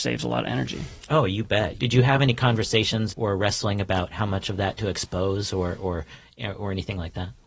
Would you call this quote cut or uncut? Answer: cut